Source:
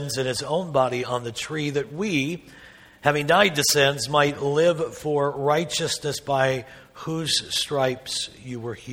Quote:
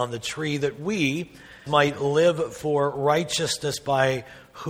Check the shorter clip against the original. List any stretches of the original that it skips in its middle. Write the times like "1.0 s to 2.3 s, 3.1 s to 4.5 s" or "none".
2.8 s to 4.1 s